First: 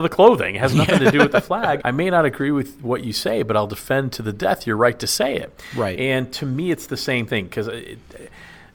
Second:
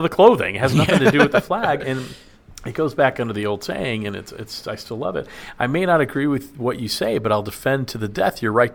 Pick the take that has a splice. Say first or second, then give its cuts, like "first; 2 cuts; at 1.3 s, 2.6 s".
first; 1 cut; at 1.8 s